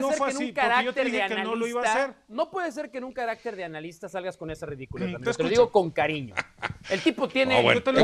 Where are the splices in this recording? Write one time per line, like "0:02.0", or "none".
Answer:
none